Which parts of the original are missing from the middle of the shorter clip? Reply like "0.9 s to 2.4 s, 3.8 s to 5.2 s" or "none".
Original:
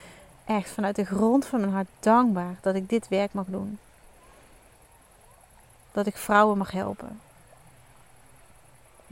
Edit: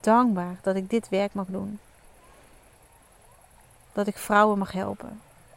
none